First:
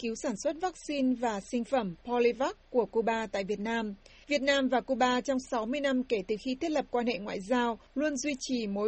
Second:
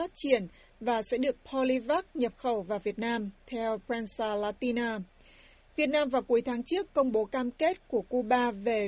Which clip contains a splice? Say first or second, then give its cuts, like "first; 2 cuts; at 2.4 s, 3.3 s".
first; 1 cut; at 4.2 s